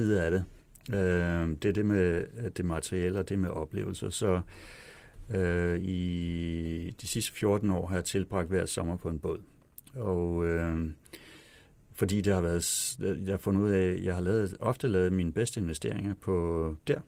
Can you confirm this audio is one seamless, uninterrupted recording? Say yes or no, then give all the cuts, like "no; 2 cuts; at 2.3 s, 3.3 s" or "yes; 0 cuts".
yes; 0 cuts